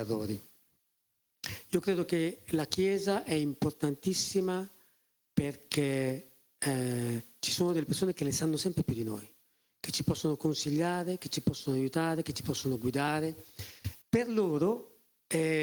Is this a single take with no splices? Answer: no; 1 cut; at 14.0 s

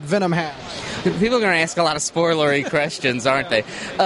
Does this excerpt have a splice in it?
yes; 1 cut; at 1.0 s

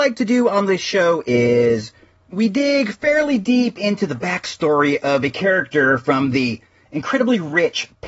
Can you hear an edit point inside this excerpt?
no; 0 cuts

